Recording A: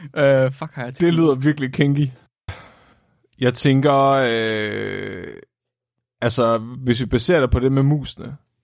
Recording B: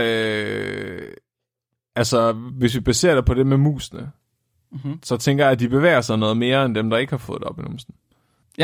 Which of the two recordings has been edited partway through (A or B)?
A